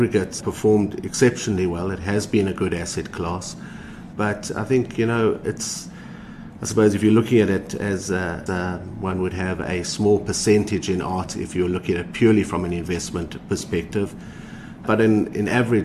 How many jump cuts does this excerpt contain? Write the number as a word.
two